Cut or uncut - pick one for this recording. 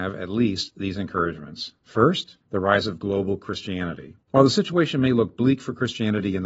cut